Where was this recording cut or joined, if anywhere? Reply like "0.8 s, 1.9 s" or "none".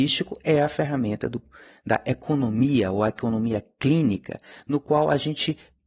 none